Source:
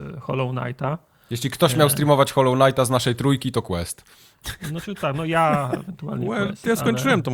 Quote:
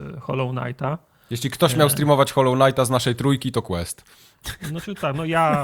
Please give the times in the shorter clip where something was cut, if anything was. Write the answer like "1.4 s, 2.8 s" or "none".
none